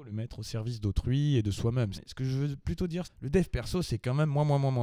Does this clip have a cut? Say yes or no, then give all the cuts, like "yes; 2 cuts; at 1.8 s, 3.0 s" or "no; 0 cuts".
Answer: yes; 2 cuts; at 1.9 s, 3.0 s